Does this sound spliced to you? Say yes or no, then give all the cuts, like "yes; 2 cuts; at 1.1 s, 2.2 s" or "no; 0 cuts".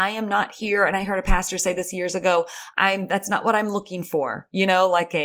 yes; 1 cut; at 2.7 s